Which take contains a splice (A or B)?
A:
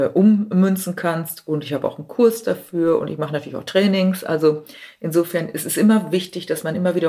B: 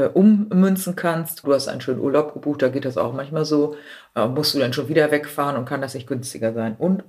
B